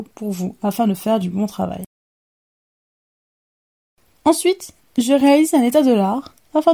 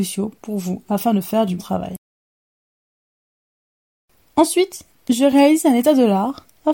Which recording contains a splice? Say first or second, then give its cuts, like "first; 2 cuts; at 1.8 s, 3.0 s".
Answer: second; 1 cut; at 1.6 s